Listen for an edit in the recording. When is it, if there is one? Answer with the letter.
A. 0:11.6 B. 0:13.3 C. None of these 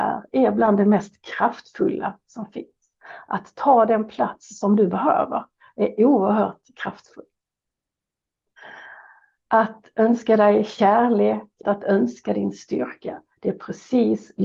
A